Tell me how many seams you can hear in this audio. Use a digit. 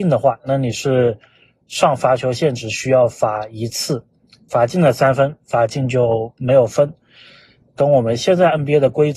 0